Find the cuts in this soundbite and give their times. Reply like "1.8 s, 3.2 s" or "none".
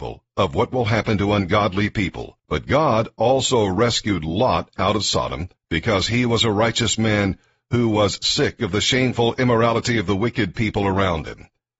2.4 s, 5.6 s

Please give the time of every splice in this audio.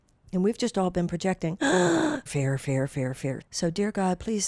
2.3 s, 3.4 s

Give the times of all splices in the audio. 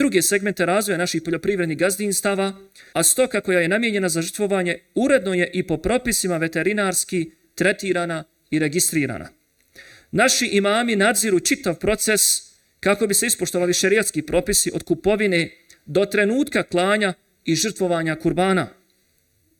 2.9 s

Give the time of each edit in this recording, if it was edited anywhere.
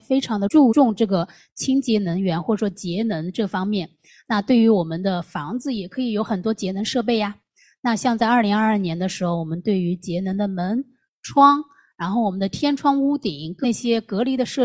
none

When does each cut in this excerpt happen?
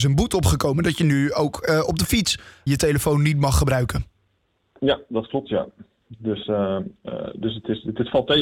2.7 s

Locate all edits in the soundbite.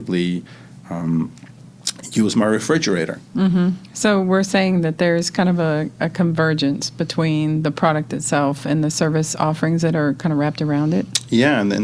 none

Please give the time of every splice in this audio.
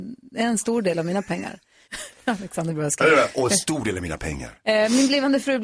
1.9 s

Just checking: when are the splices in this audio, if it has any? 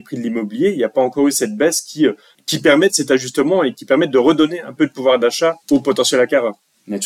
5.6 s

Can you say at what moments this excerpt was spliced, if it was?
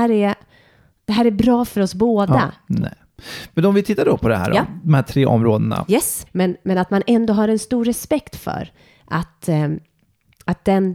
2.7 s, 6.3 s

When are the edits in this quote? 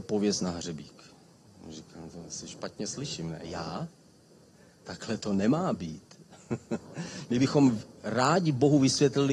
none

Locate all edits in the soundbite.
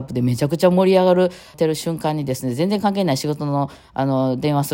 1.5 s

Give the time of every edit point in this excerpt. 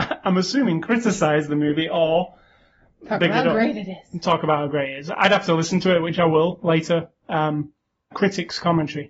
8.1 s

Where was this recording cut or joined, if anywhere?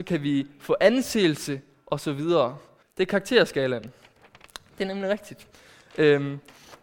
2.8 s

